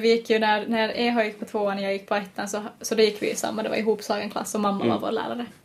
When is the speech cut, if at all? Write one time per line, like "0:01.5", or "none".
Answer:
none